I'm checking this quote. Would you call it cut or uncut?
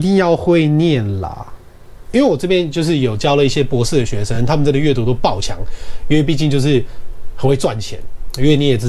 uncut